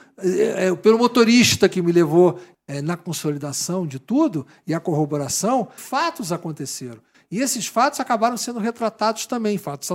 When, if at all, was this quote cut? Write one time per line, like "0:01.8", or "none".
0:02.5
0:05.8